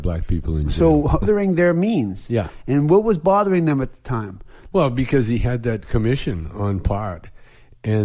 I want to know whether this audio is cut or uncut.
cut